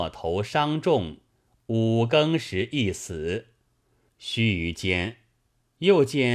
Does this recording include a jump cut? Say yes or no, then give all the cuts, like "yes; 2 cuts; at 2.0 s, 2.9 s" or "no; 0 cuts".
yes; 1 cut; at 4.1 s